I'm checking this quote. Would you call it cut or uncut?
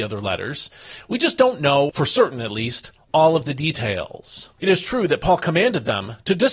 uncut